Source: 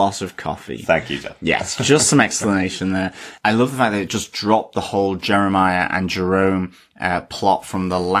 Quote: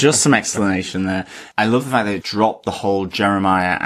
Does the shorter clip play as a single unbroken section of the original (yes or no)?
no